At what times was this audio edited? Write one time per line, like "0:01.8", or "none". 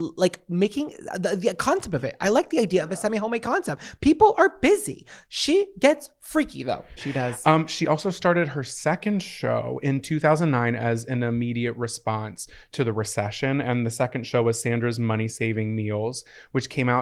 0:07.0

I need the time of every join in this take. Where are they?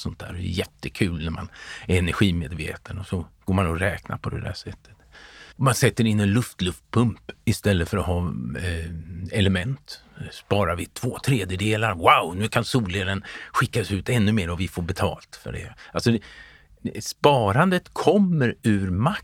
0:05.5

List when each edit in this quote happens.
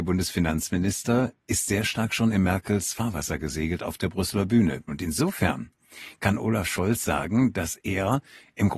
0:01.4
0:04.9

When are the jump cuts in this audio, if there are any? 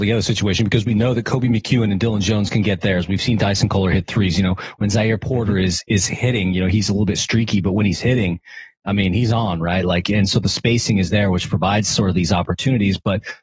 none

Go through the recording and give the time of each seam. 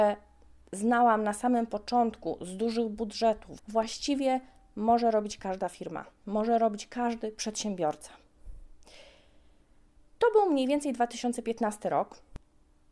0:03.6

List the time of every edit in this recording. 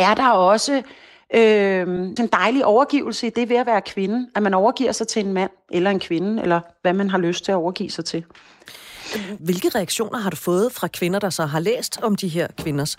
0:02.2
0:09.4

